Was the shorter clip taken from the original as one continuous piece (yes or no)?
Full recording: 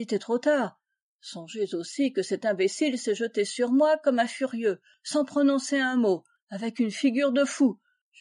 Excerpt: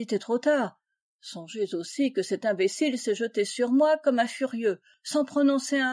yes